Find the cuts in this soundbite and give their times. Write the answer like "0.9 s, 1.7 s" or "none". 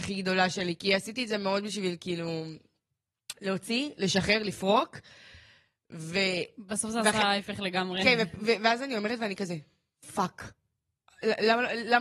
none

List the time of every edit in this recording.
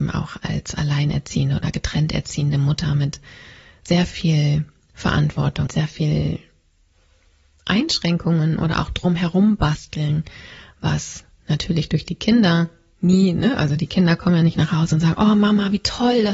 5.7 s

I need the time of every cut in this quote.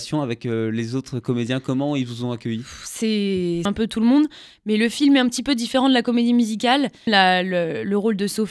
3.7 s, 7.1 s

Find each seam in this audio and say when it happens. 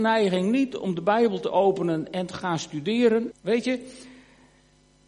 3.3 s

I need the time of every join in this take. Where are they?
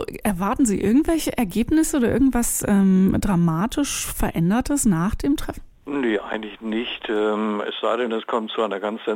none

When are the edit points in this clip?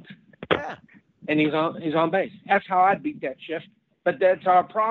none

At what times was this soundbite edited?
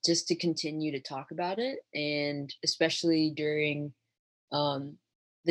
none

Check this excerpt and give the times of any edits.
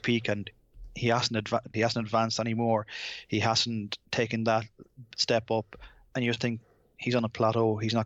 1.7 s, 4.1 s

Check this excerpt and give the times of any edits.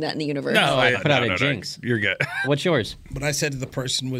0.9 s, 2.4 s

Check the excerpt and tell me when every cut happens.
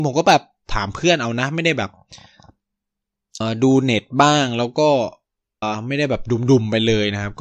3.4 s, 5.6 s

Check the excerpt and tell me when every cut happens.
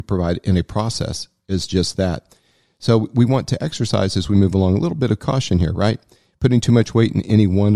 none

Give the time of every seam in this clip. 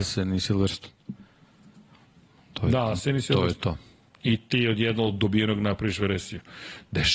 none

